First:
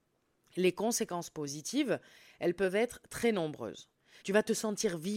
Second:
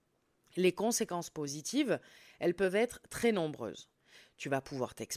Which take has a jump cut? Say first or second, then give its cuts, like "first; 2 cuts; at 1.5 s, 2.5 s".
first; 1 cut; at 4.2 s